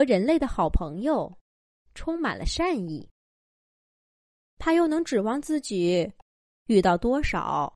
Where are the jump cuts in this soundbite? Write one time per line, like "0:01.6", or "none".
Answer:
0:04.5

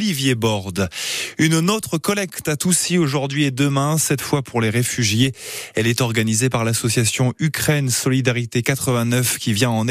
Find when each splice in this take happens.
none

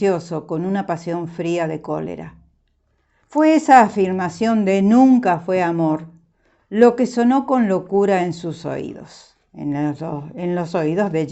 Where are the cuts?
0:03.2

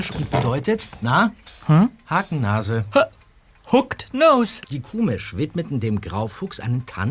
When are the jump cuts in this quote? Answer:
0:04.6

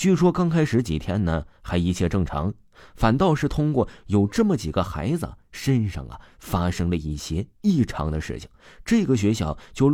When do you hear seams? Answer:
0:07.5

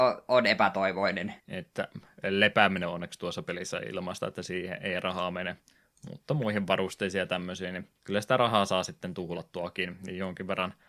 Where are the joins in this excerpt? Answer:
0:01.4
0:08.0

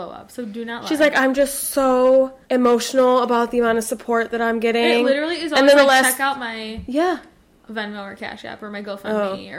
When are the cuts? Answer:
0:02.4

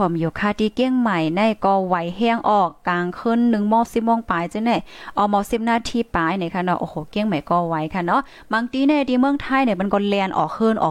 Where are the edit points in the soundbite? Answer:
none

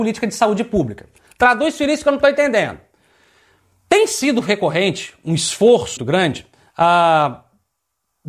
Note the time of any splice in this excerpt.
0:06.0

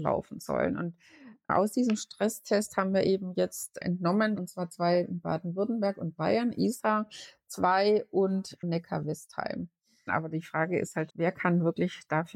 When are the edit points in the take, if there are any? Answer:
0:04.3
0:10.1
0:11.1

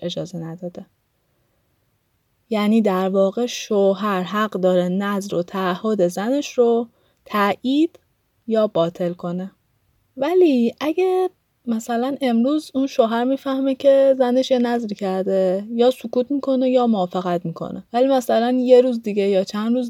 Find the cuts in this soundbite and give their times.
0:10.1
0:17.9

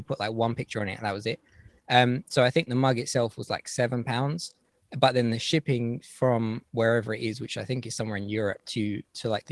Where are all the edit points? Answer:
none

